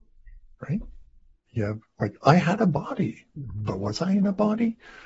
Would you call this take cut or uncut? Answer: uncut